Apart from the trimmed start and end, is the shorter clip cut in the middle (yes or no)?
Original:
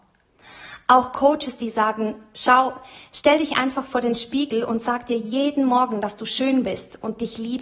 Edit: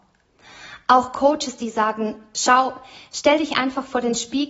no